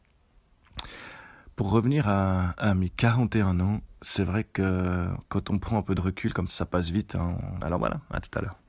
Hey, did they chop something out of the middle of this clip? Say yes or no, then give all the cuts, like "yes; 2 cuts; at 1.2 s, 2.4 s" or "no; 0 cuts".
yes; 3 cuts; at 4.0 s, 6.5 s, 7.6 s